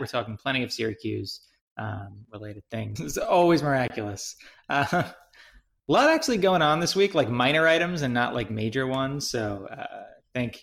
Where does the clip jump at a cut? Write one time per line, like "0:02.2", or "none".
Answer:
0:03.0